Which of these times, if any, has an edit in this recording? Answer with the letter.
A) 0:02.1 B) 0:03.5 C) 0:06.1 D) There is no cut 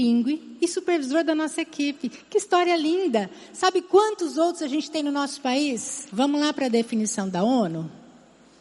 C